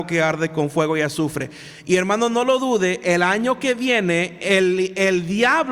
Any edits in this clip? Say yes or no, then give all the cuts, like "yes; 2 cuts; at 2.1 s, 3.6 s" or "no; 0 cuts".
no; 0 cuts